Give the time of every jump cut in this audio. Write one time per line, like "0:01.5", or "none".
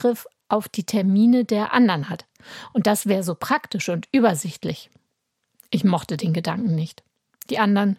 none